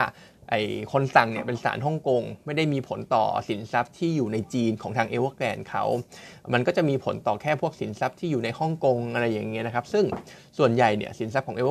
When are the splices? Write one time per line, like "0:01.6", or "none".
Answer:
none